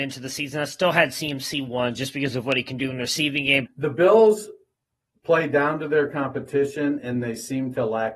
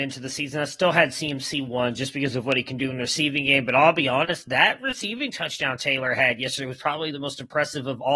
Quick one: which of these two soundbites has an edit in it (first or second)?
first